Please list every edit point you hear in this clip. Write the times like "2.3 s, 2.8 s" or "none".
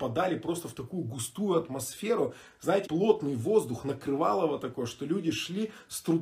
2.8 s